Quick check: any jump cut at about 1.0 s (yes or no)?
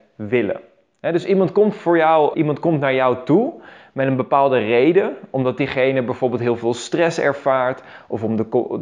no